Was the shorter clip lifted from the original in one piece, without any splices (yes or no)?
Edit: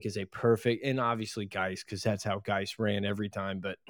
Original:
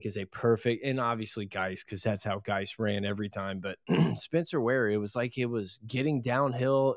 yes